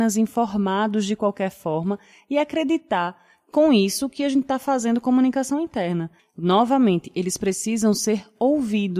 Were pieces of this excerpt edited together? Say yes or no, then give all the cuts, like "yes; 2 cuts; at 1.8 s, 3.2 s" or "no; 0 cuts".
yes; 1 cut; at 6.2 s